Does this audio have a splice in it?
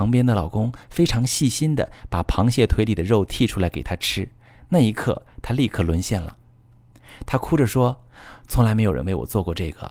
no; 0 cuts

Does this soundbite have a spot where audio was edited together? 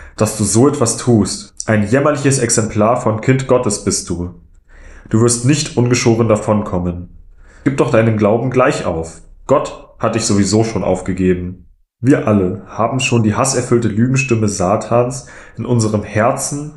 no; 0 cuts

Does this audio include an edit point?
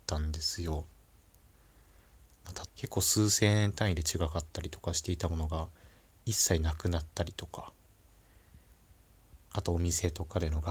yes; 1 cut; at 2.7 s

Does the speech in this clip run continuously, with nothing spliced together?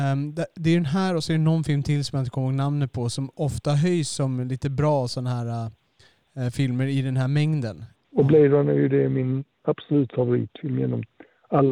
no; 1 cut; at 7.9 s

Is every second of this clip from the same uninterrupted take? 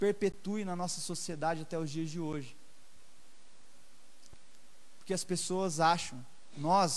yes; 0 cuts

